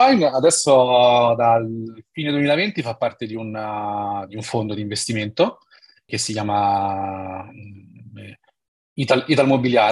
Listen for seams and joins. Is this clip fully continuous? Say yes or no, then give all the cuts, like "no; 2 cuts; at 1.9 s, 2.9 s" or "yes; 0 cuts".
no; 1 cut; at 6.1 s